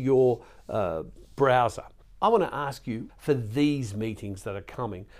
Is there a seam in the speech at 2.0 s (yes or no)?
yes